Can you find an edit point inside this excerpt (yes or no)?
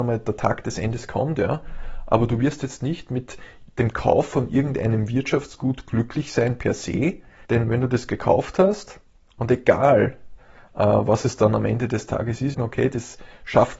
yes